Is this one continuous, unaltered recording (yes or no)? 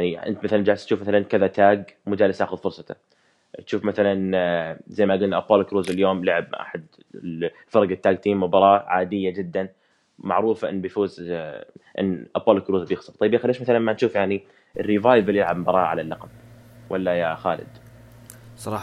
yes